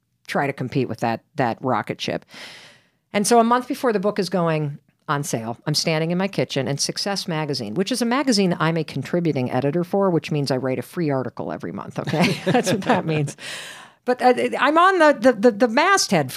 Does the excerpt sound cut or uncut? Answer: uncut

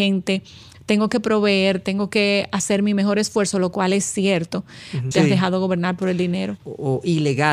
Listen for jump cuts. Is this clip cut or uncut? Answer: cut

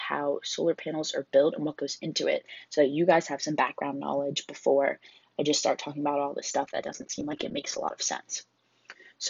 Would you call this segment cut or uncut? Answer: uncut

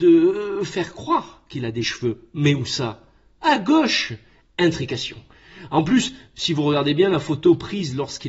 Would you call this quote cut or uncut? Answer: uncut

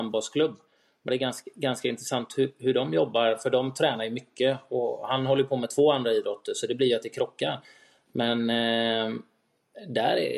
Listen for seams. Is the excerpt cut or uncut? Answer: uncut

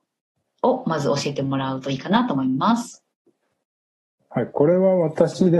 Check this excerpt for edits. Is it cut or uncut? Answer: uncut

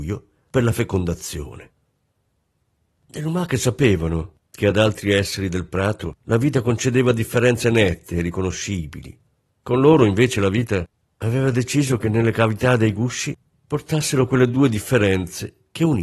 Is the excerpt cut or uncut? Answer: cut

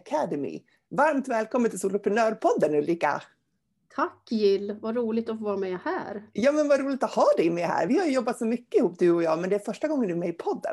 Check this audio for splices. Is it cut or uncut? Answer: uncut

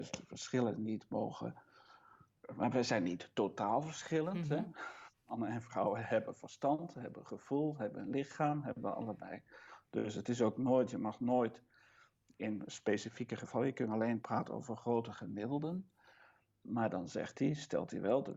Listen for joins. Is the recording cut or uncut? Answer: uncut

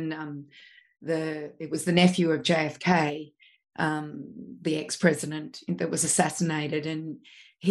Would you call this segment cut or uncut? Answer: uncut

